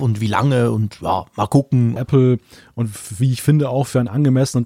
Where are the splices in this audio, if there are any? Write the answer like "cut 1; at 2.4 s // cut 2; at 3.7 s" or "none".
cut 1; at 2.0 s